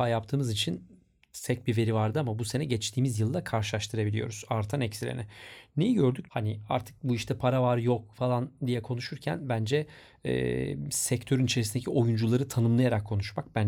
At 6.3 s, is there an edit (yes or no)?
yes